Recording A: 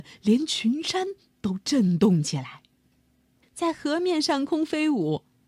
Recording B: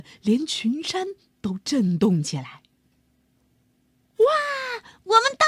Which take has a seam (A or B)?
A